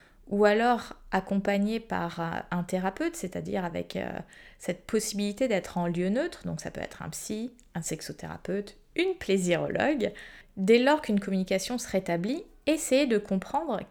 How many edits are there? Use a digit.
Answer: 0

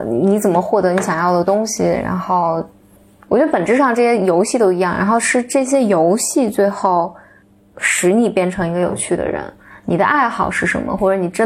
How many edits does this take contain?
0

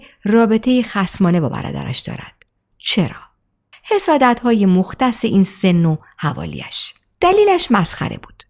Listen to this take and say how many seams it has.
1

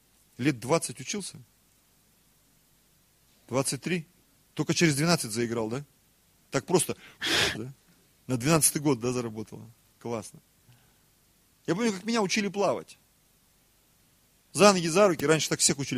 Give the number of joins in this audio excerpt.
2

